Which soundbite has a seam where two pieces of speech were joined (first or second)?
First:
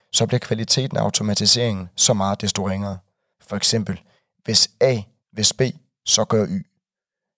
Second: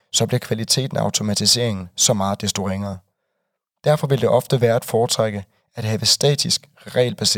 first